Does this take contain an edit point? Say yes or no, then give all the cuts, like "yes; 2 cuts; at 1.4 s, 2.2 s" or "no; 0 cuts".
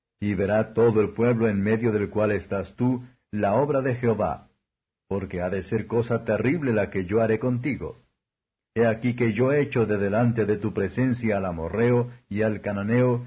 yes; 1 cut; at 8.7 s